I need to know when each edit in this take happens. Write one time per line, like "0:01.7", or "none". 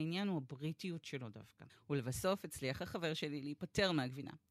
0:01.7